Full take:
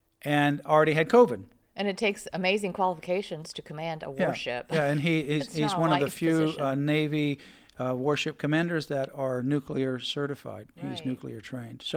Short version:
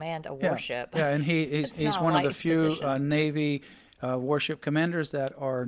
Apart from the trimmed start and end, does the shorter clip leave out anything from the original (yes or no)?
no